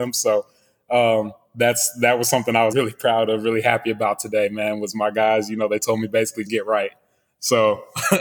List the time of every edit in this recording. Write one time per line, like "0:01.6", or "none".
0:02.7
0:06.5